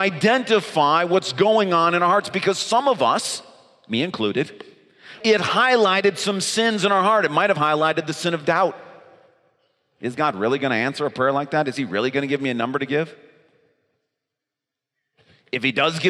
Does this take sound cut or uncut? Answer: cut